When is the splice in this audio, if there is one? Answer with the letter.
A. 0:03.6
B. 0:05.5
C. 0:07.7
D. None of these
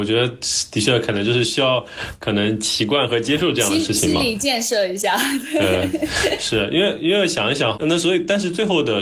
C